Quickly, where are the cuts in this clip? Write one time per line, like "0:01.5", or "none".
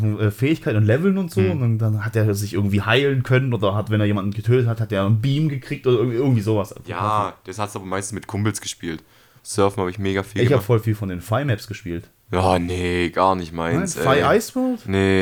0:06.8
0:09.4